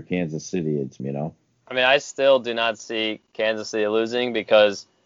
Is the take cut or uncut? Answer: cut